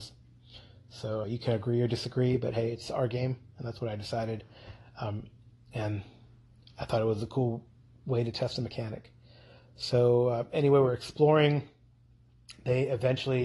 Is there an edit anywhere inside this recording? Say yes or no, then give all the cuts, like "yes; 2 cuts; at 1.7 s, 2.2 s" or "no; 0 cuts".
yes; 1 cut; at 1.2 s